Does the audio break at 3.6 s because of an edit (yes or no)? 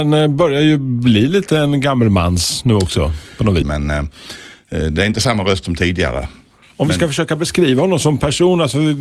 yes